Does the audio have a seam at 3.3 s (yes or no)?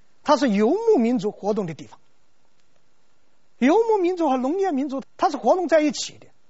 no